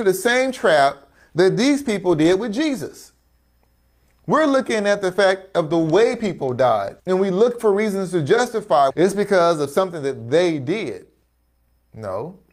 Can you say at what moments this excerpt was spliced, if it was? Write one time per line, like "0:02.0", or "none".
0:07.0
0:08.9